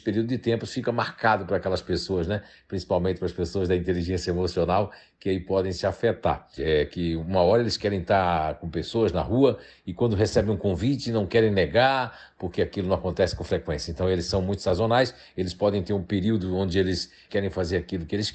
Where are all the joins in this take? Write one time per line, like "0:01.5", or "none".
0:06.6
0:17.3